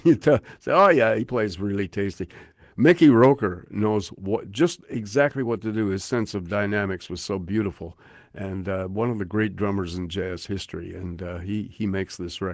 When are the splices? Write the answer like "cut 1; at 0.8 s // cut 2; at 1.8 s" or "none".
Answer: none